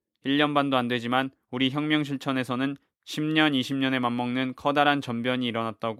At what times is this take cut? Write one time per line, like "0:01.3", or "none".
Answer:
none